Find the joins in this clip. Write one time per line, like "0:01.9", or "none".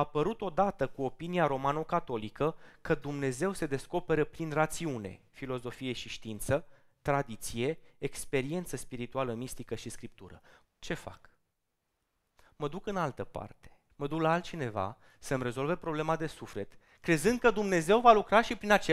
0:10.6
0:13.9